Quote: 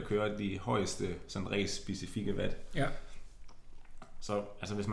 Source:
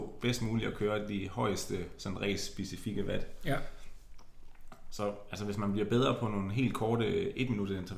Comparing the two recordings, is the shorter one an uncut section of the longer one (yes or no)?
yes